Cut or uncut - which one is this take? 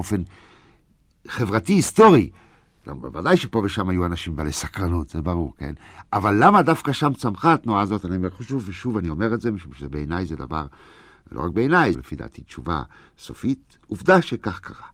cut